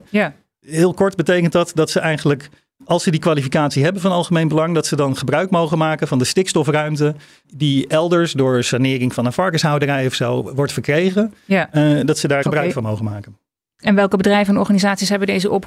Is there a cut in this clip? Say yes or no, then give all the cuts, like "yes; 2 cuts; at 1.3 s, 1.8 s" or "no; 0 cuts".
no; 0 cuts